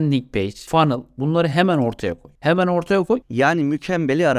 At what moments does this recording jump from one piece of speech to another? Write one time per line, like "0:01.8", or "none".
0:03.2